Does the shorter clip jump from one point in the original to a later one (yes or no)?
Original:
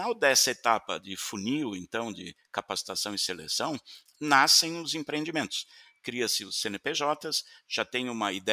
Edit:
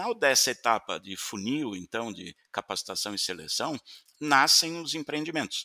no